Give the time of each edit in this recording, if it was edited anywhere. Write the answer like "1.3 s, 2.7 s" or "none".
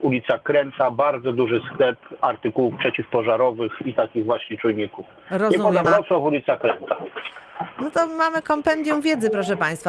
5.8 s